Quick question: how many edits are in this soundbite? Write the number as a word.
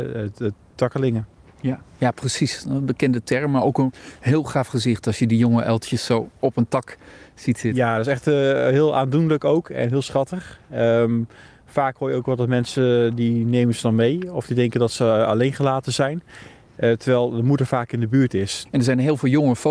one